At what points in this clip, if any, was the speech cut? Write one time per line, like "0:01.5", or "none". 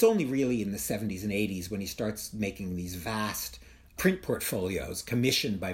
none